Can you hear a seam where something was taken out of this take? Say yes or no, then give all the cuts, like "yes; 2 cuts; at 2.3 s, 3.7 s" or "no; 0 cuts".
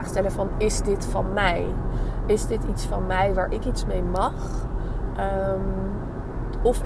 no; 0 cuts